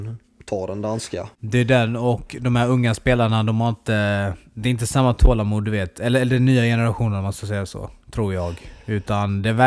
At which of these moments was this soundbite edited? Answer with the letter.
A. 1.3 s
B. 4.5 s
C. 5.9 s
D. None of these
A